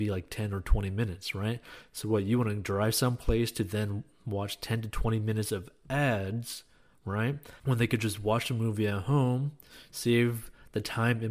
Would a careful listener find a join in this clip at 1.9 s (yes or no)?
no